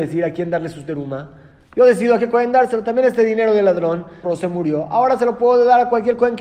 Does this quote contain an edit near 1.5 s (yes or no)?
no